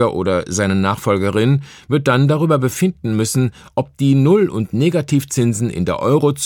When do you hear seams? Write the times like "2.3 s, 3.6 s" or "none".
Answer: none